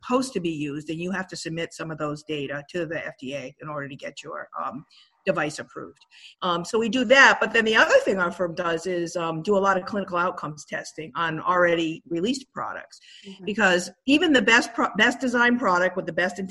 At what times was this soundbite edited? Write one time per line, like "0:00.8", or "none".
0:06.3